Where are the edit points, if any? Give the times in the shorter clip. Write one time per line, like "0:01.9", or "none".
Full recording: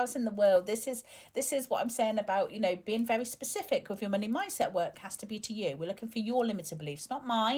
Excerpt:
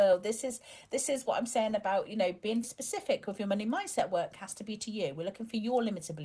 0:02.6